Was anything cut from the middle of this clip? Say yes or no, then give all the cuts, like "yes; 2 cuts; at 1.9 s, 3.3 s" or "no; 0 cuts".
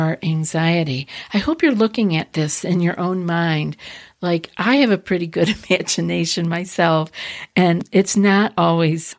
no; 0 cuts